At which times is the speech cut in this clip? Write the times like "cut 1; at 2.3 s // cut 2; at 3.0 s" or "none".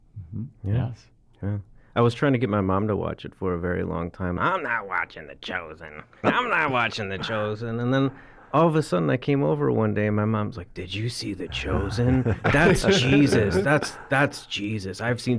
cut 1; at 4.4 s // cut 2; at 6.2 s